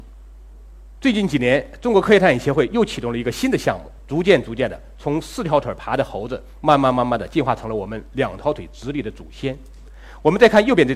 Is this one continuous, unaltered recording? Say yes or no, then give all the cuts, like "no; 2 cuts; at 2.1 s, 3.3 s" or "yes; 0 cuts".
no; 1 cut; at 4.0 s